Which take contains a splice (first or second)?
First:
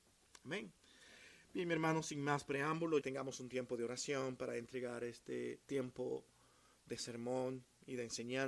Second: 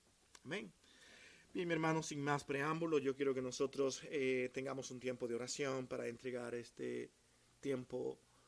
first